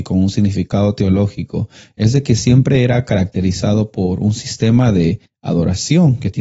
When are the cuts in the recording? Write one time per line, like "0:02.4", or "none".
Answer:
none